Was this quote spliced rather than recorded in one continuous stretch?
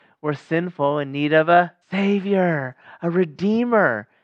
yes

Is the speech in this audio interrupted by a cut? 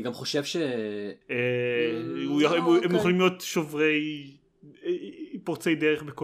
yes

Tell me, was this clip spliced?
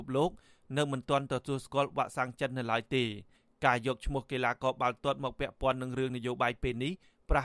no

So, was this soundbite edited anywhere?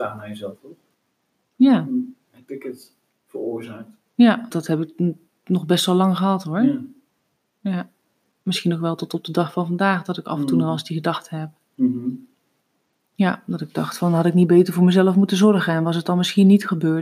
yes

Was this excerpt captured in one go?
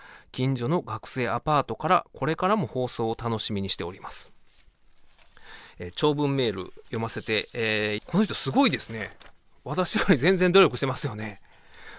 no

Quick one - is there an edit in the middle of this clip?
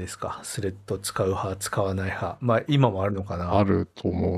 no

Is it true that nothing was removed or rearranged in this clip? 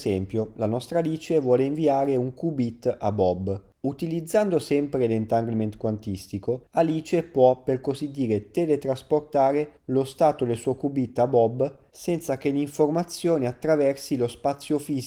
yes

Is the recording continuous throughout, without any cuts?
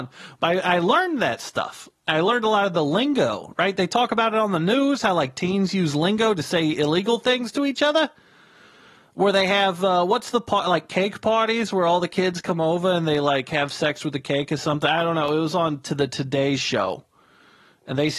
yes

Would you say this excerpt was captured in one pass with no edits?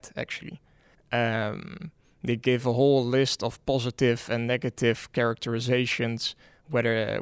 no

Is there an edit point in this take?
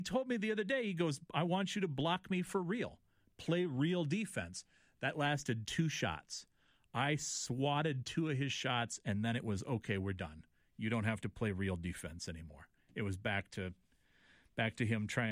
no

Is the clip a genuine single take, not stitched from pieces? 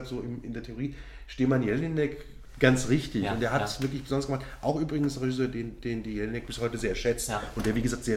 yes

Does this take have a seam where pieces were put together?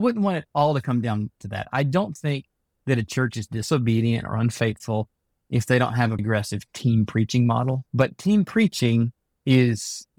yes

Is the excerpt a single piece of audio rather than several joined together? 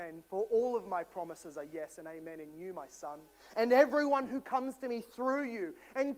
yes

